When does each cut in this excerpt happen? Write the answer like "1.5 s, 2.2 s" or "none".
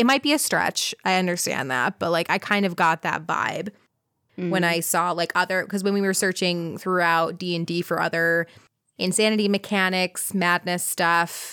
none